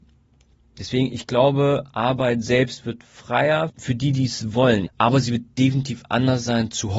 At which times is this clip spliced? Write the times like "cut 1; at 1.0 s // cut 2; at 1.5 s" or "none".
cut 1; at 3.7 s // cut 2; at 4.9 s